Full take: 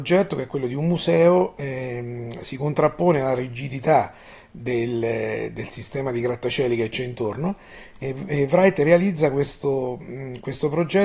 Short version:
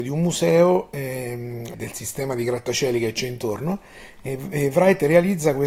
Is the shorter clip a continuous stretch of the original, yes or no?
no